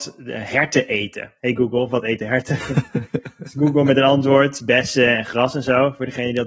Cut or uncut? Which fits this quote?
cut